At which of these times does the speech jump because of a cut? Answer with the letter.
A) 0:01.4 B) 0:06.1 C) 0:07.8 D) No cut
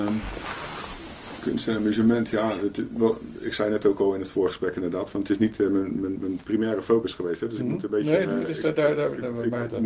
B